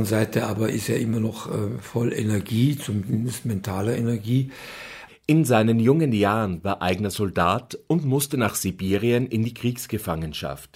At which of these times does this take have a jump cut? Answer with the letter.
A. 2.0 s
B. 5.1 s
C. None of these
B